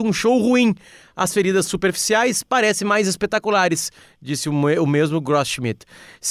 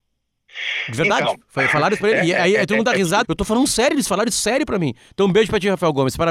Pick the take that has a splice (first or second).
second